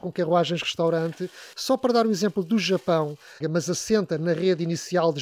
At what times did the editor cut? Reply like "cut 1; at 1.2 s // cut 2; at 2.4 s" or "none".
cut 1; at 1.5 s // cut 2; at 3.4 s